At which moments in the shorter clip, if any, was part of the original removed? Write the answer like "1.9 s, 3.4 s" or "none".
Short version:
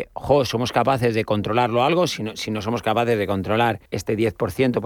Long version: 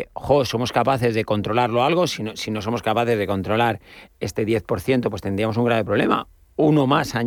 3.9 s